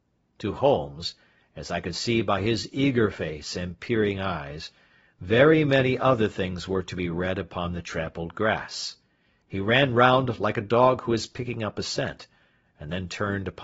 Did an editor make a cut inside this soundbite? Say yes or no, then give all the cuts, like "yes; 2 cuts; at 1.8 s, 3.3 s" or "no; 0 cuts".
no; 0 cuts